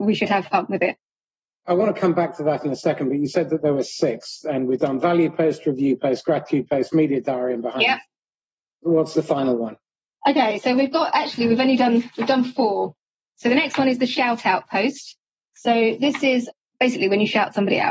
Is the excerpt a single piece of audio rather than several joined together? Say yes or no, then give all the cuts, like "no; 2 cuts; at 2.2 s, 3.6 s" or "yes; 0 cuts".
yes; 0 cuts